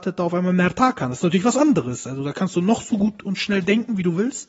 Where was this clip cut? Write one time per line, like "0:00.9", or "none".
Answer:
none